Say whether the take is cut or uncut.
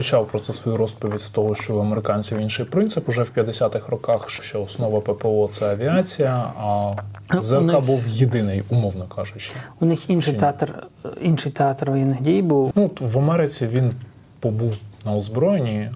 cut